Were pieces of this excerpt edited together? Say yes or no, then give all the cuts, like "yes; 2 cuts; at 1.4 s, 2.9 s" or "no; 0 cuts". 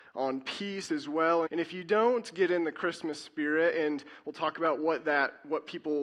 yes; 1 cut; at 1.5 s